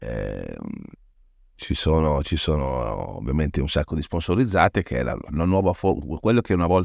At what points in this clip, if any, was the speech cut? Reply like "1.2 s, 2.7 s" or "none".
none